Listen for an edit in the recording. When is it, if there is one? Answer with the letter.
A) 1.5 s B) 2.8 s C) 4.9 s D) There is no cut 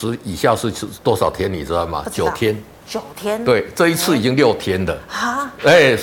D